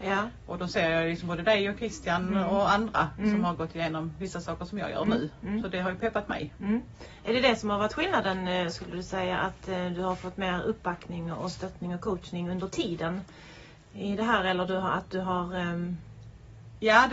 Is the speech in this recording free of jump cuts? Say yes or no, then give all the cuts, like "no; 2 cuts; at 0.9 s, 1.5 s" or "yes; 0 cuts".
yes; 0 cuts